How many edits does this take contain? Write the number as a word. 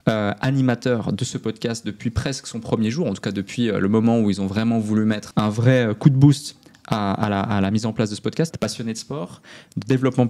two